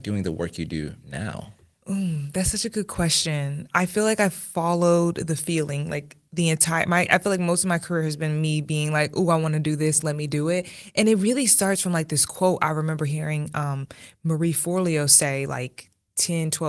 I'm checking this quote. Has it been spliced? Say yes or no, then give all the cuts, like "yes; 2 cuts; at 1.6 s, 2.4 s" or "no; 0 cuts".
no; 0 cuts